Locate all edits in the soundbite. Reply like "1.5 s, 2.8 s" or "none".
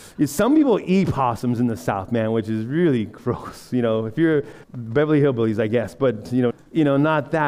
4.6 s, 6.5 s